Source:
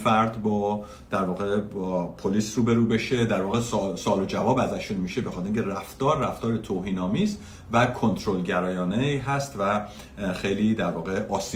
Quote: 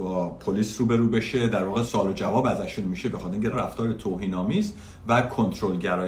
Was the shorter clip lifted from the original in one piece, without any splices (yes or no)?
no